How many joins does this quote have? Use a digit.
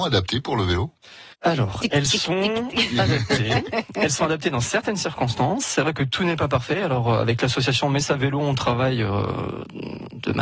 1